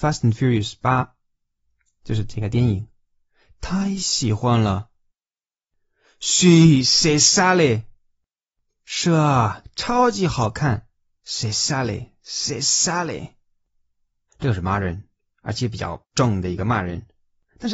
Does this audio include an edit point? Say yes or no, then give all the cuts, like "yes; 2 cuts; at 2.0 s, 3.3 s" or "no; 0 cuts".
yes; 2 cuts; at 11.2 s, 14.3 s